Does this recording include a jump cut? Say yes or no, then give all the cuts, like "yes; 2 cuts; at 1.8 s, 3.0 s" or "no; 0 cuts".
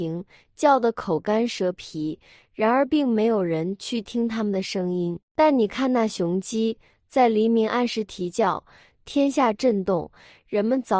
no; 0 cuts